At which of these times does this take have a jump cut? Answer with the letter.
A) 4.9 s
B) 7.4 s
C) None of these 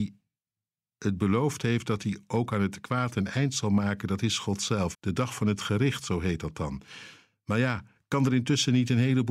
A